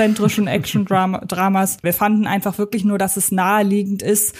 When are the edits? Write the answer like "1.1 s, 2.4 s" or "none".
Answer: 1.8 s